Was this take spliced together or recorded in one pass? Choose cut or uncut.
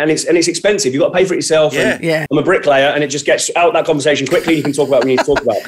cut